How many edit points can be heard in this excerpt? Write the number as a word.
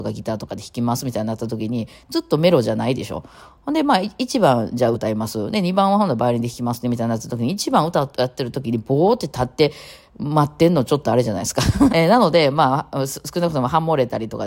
two